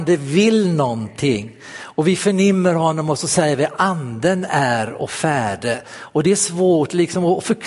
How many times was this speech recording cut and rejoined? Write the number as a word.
zero